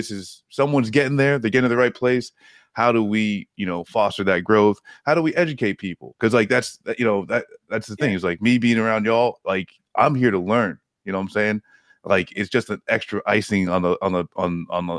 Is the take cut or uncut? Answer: uncut